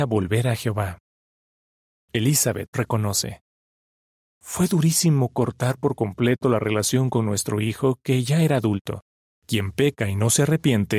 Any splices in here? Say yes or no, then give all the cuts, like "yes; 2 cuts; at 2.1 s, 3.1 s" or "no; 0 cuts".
yes; 2 cuts; at 2.7 s, 9.3 s